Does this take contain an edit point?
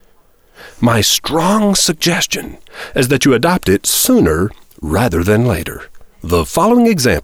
yes; 1 cut; at 6.1 s

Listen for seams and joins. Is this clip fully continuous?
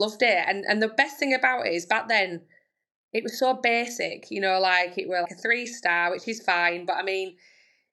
no; 1 cut; at 5.2 s

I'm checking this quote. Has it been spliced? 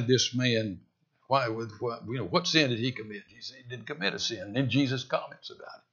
no; 0 cuts

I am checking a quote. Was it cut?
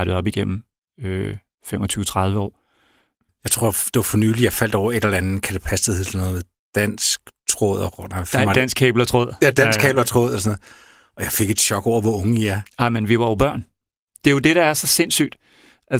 no; 0 cuts

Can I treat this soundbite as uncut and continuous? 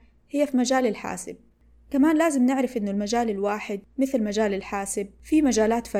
yes; 0 cuts

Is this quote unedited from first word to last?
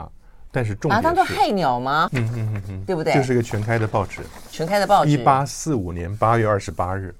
no; 1 cut; at 2.1 s

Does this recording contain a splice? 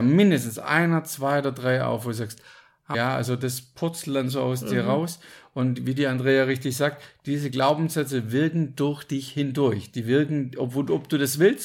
yes; 1 cut; at 2.9 s

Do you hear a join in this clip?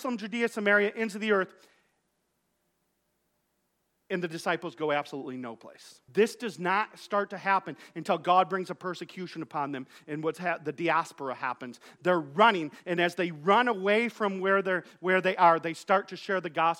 yes; 1 cut; at 6.1 s

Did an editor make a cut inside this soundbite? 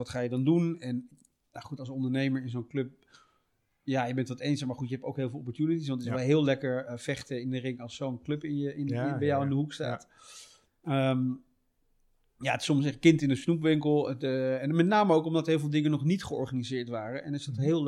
no; 0 cuts

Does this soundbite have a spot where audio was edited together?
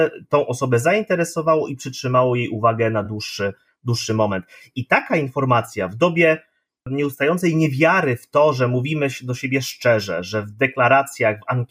no; 0 cuts

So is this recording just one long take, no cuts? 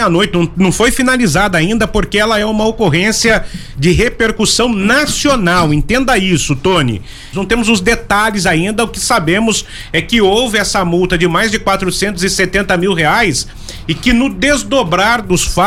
no; 1 cut; at 7.3 s

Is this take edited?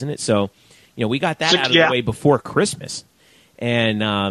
no; 0 cuts

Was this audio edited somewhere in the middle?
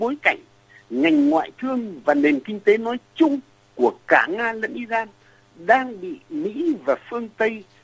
no; 0 cuts

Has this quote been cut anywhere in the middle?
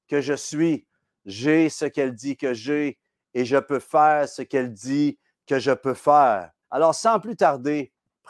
yes; 1 cut; at 6.6 s

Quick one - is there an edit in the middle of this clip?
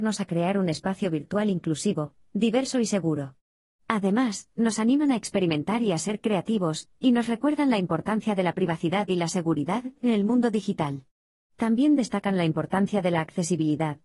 no; 0 cuts

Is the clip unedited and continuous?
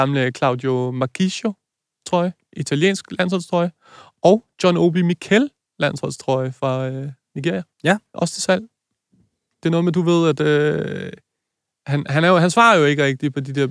no; 1 cut; at 7.7 s

